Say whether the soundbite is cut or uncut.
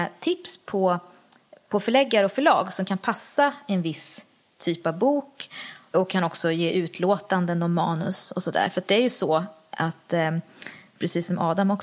uncut